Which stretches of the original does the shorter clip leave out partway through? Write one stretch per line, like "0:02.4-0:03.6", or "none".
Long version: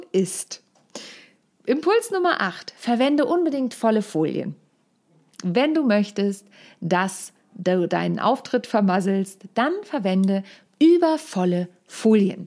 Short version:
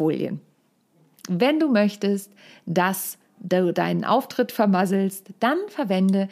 none